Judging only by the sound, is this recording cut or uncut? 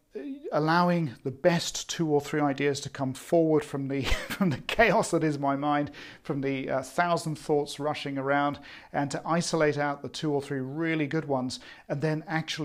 uncut